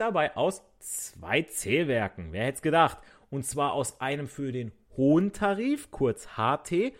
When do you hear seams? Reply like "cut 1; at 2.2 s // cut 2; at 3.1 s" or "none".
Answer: none

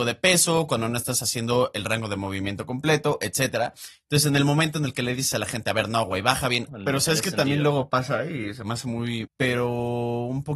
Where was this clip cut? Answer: cut 1; at 6.7 s // cut 2; at 9.2 s

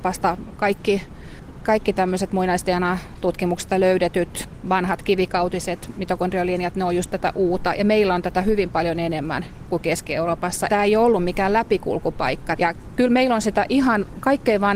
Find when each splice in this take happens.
cut 1; at 10.7 s // cut 2; at 12.6 s

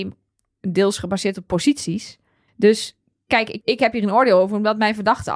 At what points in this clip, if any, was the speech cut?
cut 1; at 2.5 s // cut 2; at 3.6 s

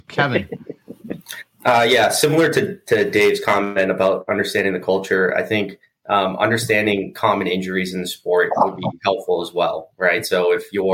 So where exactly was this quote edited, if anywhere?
none

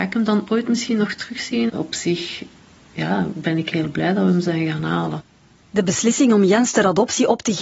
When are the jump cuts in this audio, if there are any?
cut 1; at 1.7 s

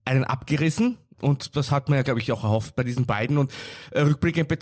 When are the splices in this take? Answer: none

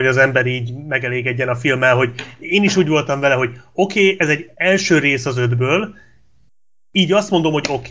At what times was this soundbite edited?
cut 1; at 4.5 s

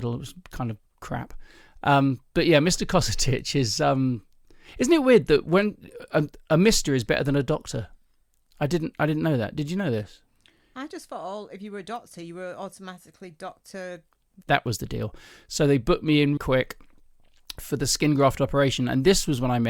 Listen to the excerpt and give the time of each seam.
cut 1; at 14.4 s // cut 2; at 16.4 s

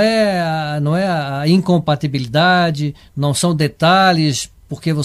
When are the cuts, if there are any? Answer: none

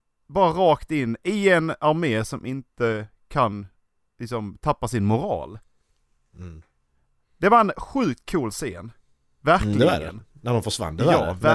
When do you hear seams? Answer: none

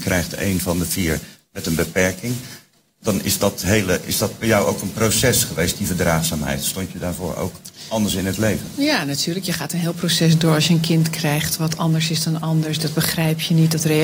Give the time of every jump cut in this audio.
none

